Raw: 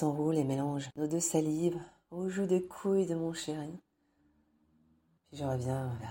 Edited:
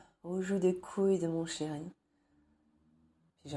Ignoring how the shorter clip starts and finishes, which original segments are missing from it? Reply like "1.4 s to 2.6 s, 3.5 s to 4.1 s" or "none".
none